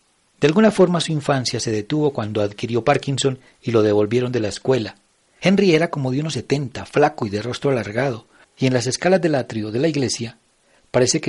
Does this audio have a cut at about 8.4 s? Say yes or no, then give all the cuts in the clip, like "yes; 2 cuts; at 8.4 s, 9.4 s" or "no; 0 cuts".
yes; 2 cuts; at 5.3 s, 8.4 s